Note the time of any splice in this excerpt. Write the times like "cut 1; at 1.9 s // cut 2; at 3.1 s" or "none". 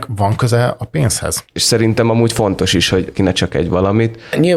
cut 1; at 1.5 s // cut 2; at 3.1 s